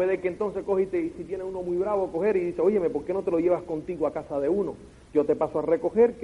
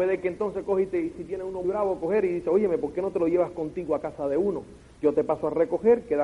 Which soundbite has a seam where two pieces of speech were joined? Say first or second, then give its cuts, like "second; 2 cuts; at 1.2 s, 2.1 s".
second; 1 cut; at 1.6 s